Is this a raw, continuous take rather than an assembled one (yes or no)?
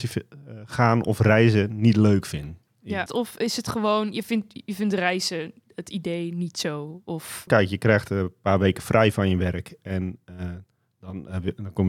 no